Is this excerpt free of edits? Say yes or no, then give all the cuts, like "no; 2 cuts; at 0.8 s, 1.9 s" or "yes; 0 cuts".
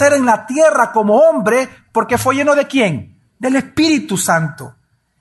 yes; 0 cuts